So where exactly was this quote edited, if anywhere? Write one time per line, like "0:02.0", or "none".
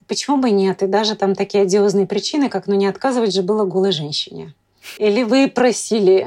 0:05.0